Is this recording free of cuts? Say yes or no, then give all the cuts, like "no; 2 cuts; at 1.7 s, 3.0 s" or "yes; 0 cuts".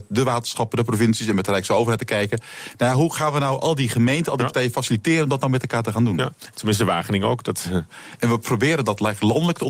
no; 2 cuts; at 6.5 s, 7.9 s